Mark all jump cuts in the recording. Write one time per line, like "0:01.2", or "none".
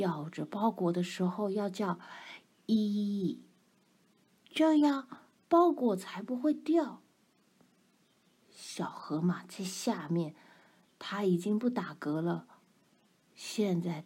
none

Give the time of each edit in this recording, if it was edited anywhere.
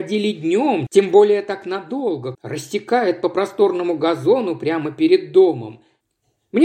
0:02.3

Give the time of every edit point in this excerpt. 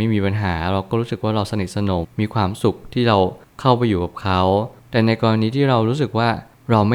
0:02.0

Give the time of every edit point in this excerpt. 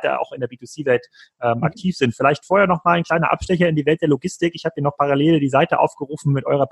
none

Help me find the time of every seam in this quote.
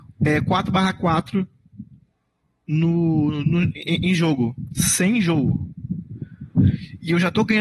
none

